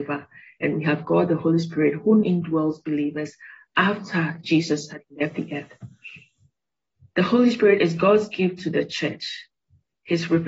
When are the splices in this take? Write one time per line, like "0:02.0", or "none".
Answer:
0:02.2